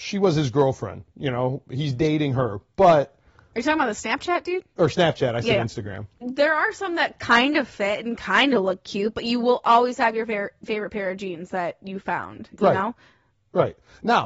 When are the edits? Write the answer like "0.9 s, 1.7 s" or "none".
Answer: 6.2 s

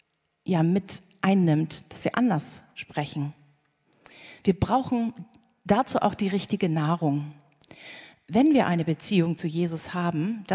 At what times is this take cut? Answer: none

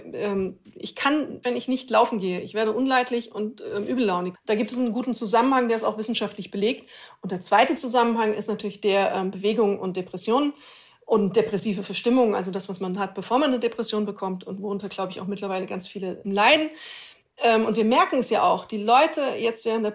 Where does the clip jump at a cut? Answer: 1.4 s, 4.4 s, 16.2 s

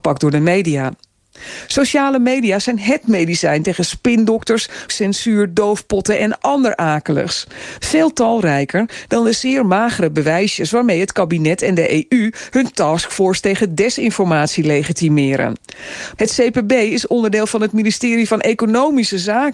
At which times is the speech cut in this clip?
4.9 s, 7.8 s, 16.2 s

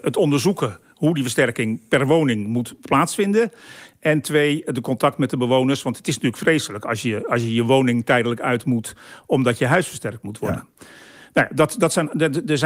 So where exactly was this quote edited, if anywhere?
none

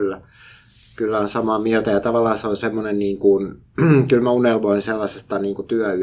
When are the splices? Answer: none

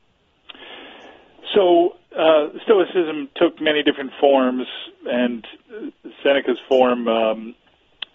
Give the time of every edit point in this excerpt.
none

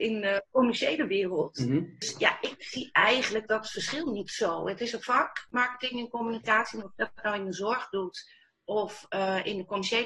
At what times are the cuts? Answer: none

